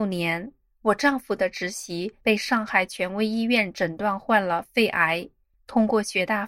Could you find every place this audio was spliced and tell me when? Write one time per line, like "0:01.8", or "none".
0:05.5